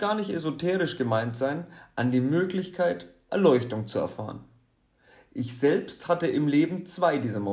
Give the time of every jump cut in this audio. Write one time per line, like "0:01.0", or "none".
none

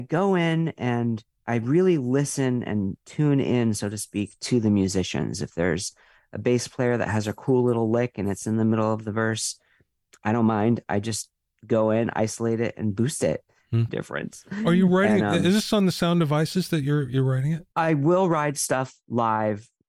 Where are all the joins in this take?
0:13.9
0:17.7

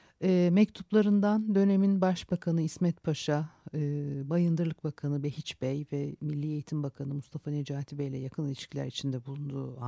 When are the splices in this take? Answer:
none

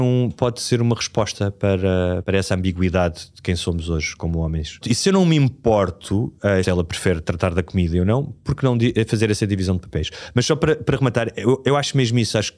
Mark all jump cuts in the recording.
0:04.8
0:06.6

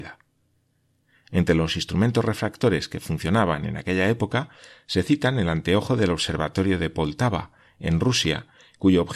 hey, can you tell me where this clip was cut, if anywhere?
none

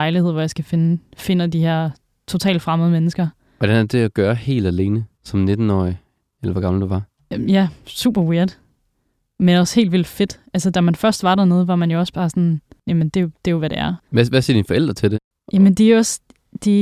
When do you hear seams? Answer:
0:14.0

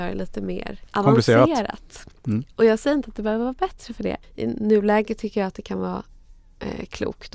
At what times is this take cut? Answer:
0:04.2

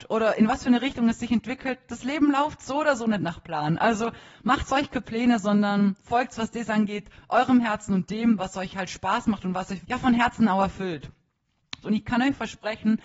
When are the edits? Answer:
0:09.8
0:11.8

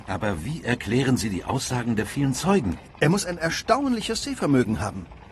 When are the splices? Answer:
0:02.9

